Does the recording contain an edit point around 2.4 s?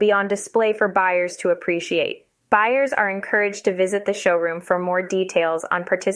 yes; 1 cut; at 2.4 s

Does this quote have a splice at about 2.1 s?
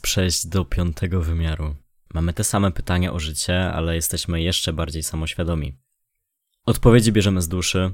yes; 1 cut; at 2.1 s

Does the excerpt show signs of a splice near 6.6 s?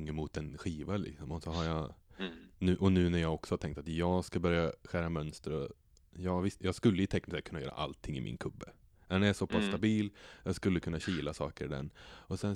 yes; 1 cut; at 6.6 s

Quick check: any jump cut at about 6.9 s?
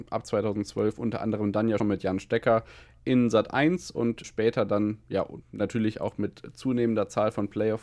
no; 2 cuts; at 1.8 s, 4.2 s

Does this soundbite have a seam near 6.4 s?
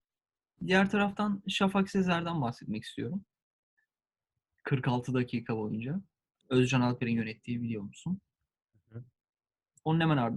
yes; 1 cut; at 6.4 s

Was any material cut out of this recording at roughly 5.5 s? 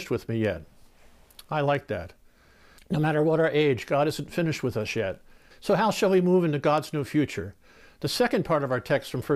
yes; 2 cuts; at 2.8 s, 5.5 s

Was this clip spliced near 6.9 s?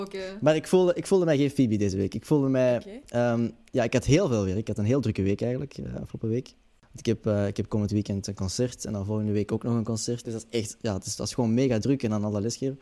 no; 1 cut; at 10.2 s

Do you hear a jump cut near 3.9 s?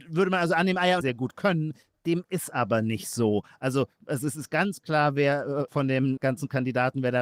no; 1 cut; at 1.0 s

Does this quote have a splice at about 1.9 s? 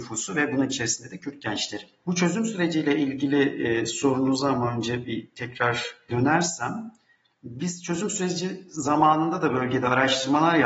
no; 0 cuts

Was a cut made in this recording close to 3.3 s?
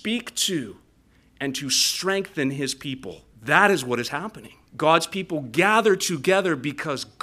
yes; 2 cuts; at 3.3 s, 4.7 s

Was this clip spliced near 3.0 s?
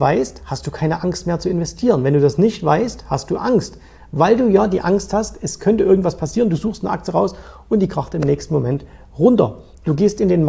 no; 0 cuts

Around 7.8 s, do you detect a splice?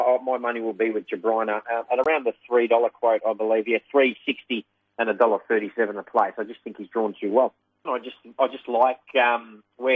yes; 1 cut; at 7.8 s

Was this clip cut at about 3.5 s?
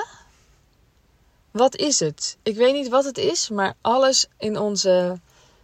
no; 1 cut; at 1.4 s

